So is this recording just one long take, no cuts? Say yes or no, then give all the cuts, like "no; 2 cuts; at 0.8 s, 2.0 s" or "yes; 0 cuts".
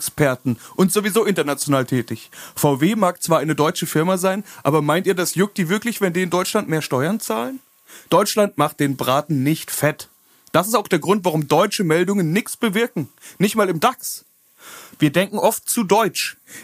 no; 2 cuts; at 8.1 s, 15.0 s